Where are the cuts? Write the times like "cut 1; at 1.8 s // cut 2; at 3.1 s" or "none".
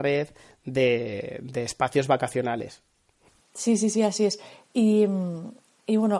none